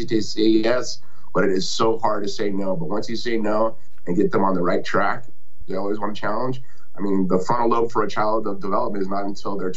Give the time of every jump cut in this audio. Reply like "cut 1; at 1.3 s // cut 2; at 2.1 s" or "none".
cut 1; at 5.6 s